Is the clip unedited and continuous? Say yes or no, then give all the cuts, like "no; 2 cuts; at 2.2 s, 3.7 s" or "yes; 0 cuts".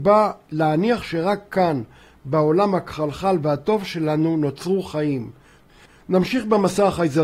yes; 0 cuts